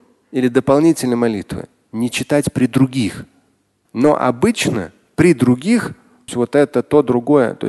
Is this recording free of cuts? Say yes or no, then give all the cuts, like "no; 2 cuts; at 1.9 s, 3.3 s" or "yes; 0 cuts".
no; 2 cuts; at 3.9 s, 6.3 s